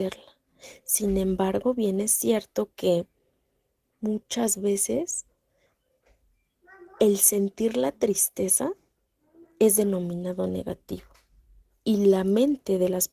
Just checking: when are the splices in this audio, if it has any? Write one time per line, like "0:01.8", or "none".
none